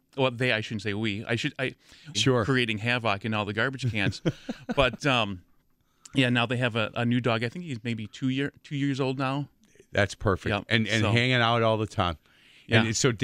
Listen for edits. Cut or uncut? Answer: cut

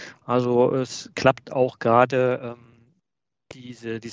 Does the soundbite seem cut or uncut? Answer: uncut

